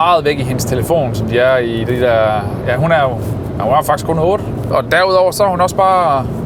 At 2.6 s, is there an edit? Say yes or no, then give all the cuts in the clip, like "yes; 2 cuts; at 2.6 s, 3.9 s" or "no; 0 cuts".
no; 1 cut; at 4.7 s